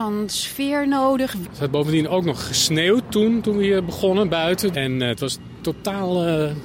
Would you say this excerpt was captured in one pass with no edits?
no; 2 cuts; at 1.4 s, 4.7 s

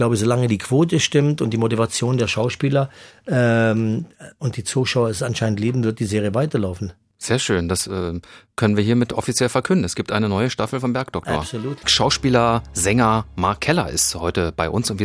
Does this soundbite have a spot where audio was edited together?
no; 0 cuts

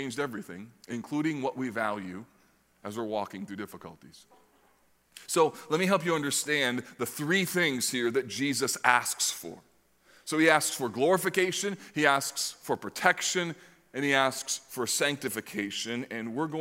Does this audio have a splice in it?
no; 0 cuts

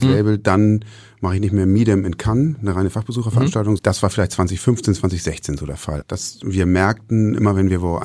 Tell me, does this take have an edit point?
yes; 2 cuts; at 3.8 s, 6.0 s

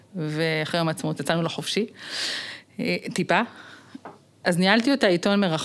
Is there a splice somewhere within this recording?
no; 0 cuts

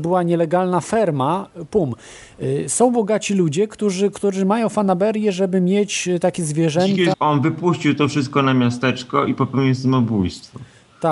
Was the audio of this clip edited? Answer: yes; 1 cut; at 7.1 s

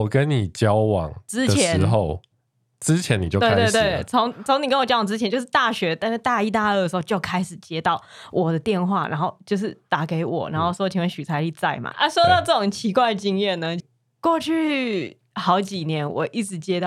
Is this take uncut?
no; 2 cuts; at 11.9 s, 13.8 s

